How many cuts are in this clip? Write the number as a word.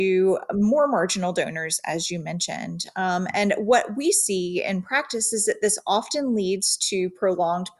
zero